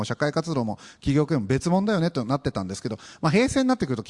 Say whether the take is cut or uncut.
uncut